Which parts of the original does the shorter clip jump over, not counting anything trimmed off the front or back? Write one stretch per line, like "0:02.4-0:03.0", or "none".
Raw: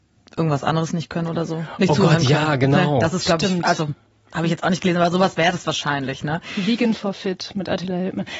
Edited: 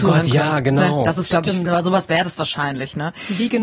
0:03.6-0:04.9